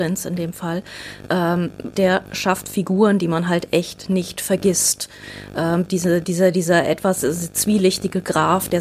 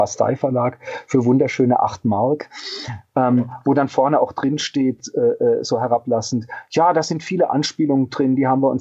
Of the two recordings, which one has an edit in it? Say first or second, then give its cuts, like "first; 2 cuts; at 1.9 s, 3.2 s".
first; 1 cut; at 1.9 s